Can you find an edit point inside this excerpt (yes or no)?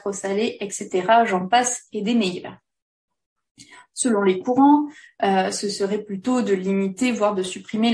no